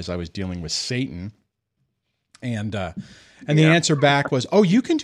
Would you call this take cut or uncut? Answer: uncut